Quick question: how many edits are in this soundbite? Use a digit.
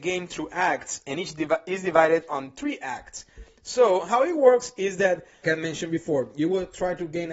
1